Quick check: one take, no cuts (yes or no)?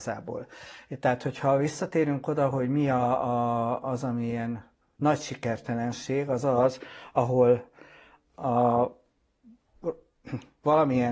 yes